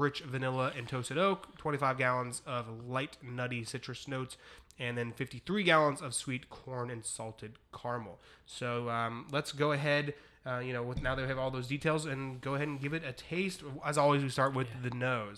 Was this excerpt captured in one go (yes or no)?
yes